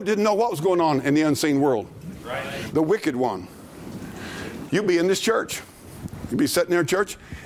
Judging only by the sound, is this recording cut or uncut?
cut